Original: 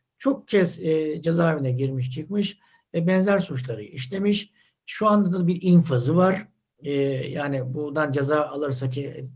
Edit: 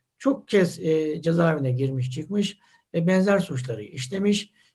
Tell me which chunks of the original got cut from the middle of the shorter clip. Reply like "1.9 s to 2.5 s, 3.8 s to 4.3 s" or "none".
none